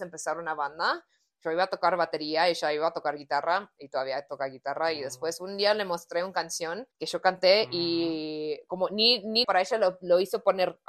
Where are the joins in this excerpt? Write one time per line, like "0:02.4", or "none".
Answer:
0:06.9
0:09.4